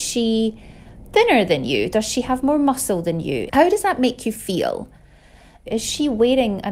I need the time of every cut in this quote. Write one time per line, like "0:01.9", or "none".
0:03.5
0:05.7